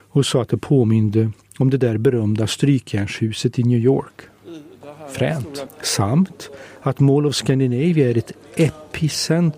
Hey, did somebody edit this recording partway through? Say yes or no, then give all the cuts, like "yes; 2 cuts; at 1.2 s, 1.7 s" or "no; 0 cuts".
yes; 1 cut; at 5.7 s